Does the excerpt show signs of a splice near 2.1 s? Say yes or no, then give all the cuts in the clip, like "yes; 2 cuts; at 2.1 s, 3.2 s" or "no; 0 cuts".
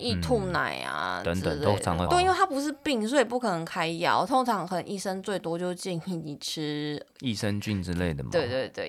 yes; 1 cut; at 2.1 s